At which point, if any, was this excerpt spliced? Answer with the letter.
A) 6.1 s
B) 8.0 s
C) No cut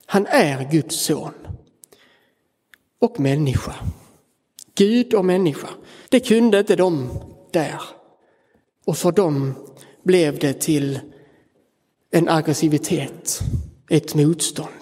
A